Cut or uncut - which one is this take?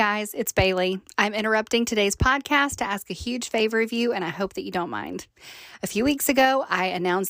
uncut